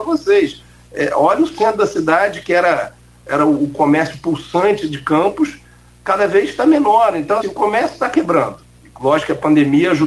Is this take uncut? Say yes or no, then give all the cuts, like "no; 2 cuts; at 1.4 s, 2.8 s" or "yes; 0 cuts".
no; 1 cut; at 7.4 s